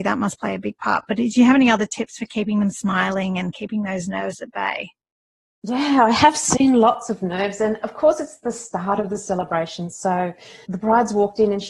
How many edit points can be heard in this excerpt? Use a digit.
0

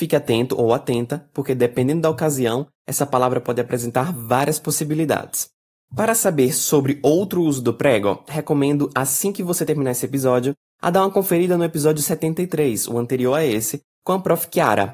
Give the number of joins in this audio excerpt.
0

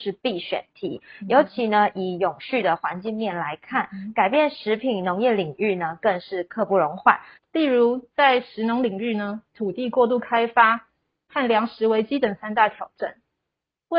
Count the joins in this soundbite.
2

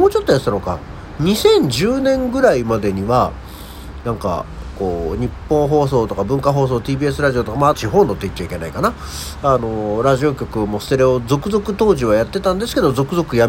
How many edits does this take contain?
1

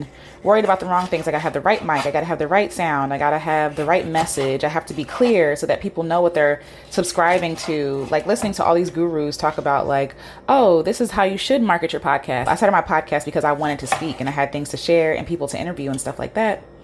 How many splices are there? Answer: 1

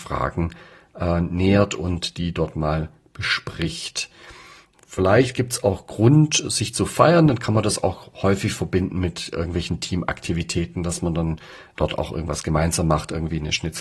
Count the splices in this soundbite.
0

